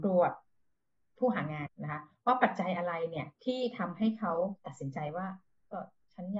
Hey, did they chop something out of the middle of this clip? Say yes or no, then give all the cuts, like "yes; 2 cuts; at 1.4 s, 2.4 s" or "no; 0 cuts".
yes; 2 cuts; at 1.7 s, 3.3 s